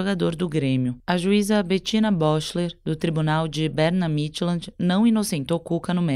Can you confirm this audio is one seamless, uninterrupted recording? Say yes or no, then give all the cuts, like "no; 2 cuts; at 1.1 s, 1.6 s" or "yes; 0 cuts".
no; 1 cut; at 1.0 s